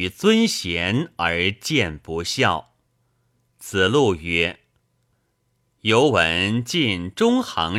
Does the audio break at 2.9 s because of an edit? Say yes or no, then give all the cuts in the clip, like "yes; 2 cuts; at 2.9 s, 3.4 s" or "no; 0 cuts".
no; 0 cuts